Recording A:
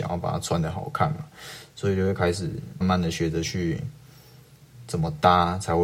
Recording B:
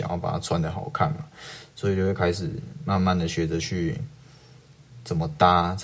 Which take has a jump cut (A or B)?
A